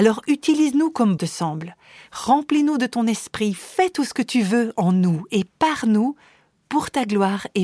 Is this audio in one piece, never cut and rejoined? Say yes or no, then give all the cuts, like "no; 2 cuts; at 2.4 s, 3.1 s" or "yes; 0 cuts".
no; 1 cut; at 1.2 s